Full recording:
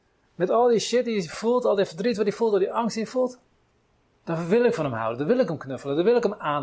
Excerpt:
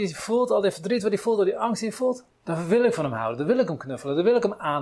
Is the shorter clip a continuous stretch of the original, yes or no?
no